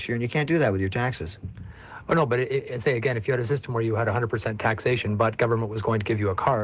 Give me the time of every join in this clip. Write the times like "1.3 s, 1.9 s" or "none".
none